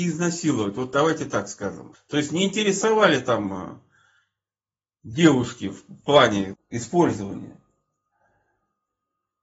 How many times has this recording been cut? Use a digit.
2